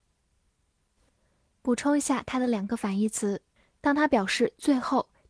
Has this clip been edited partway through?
no; 0 cuts

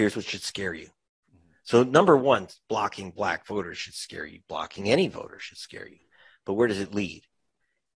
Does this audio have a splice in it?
no; 0 cuts

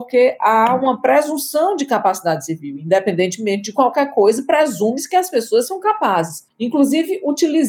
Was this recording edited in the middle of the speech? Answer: yes; 1 cut; at 6.5 s

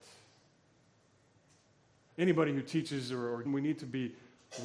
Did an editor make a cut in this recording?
yes; 2 cuts; at 2.1 s, 3.5 s

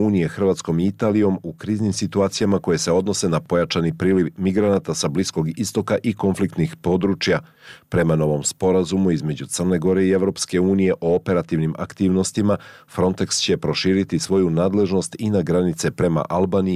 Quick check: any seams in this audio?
no; 0 cuts

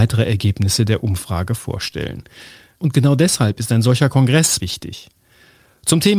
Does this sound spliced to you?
yes; 2 cuts; at 2.7 s, 4.6 s

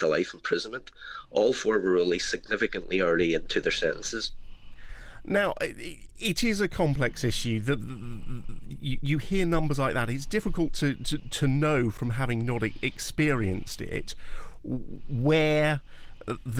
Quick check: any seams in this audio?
no; 0 cuts

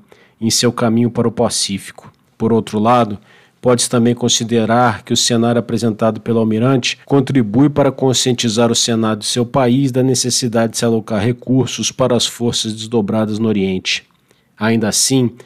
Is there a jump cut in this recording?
yes; 2 cuts; at 2.2 s, 7.0 s

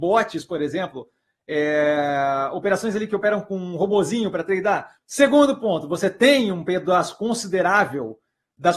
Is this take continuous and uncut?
no; 1 cut; at 5.0 s

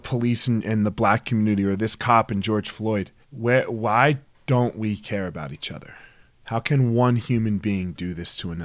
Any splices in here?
yes; 2 cuts; at 3.2 s, 6.4 s

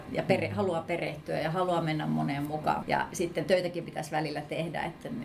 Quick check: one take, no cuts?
no; 1 cut; at 2.8 s

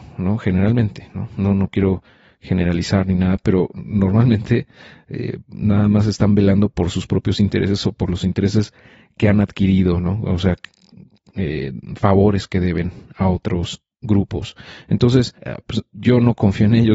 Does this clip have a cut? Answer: yes; 1 cut; at 15.4 s

